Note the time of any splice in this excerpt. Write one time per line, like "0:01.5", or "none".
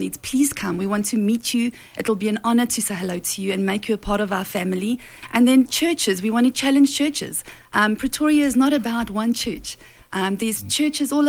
none